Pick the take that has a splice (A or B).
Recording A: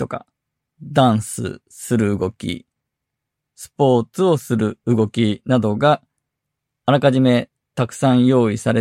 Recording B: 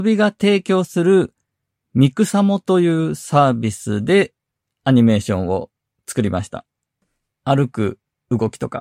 B